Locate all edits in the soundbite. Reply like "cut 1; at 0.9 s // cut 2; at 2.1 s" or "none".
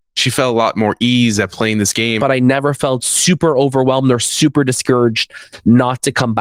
cut 1; at 2.2 s